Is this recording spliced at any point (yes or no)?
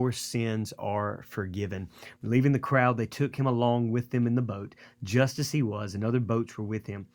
yes